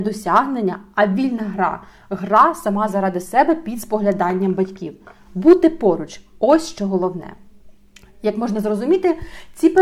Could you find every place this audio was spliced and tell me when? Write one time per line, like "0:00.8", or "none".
none